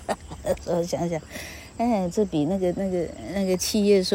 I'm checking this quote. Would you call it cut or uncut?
uncut